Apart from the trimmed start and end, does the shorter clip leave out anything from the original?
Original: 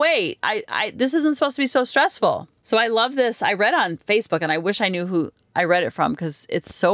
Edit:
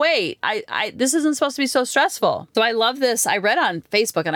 yes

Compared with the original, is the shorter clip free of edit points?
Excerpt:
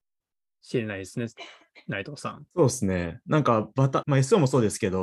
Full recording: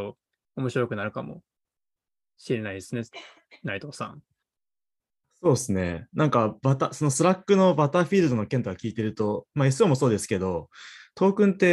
no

